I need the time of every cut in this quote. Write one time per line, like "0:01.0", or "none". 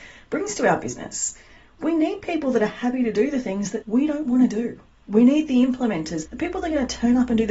0:03.8
0:06.2

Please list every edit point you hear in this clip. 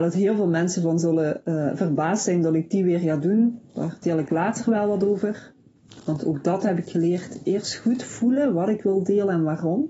none

